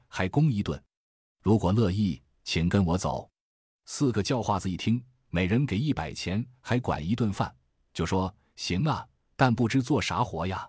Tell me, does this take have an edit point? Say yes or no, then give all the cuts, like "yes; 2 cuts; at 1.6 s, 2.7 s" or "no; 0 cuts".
yes; 1 cut; at 7.8 s